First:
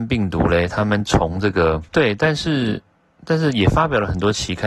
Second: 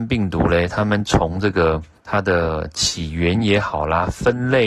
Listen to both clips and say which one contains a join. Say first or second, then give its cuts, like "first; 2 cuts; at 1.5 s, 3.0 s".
first; 1 cut; at 1.9 s